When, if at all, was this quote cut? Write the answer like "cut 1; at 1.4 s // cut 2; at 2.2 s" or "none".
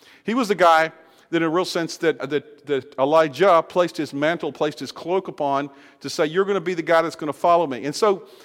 cut 1; at 2.2 s